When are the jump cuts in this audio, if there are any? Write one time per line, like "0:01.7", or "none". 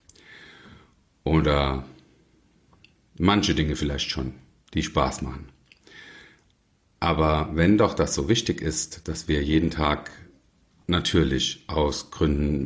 none